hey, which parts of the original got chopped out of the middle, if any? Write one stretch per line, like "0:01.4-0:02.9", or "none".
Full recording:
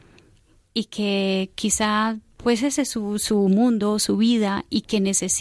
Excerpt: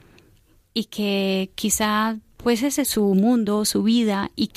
0:02.8-0:03.2